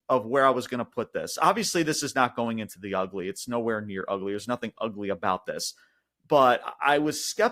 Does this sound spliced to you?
no; 0 cuts

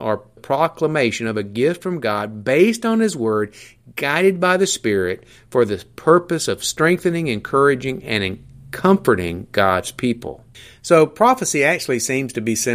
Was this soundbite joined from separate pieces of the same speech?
no; 0 cuts

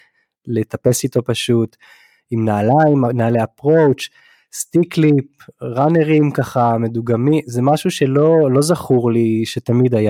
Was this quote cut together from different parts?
no; 0 cuts

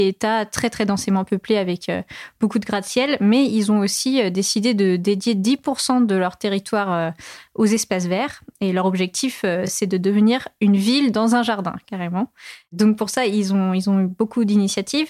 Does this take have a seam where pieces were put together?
no; 0 cuts

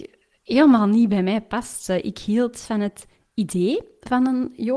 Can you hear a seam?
no; 0 cuts

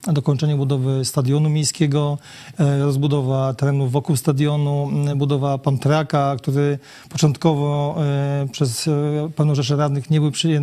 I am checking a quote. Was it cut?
no; 0 cuts

